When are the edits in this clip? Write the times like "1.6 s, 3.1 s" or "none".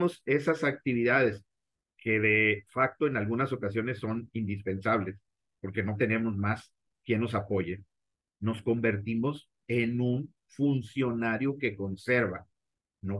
none